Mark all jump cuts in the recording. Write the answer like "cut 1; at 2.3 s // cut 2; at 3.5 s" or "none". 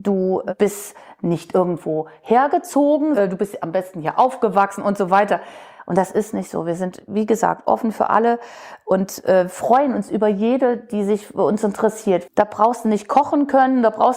cut 1; at 12.3 s